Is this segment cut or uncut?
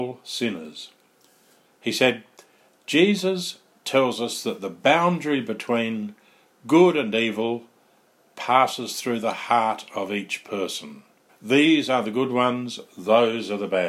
cut